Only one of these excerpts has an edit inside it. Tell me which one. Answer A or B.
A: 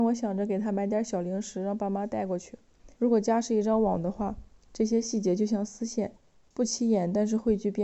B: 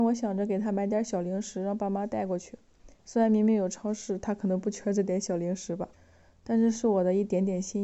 A